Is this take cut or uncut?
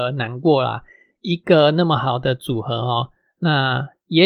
uncut